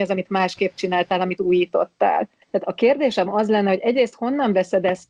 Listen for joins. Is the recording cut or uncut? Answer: cut